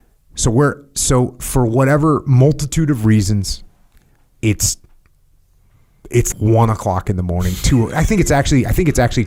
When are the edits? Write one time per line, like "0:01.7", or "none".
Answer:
0:06.3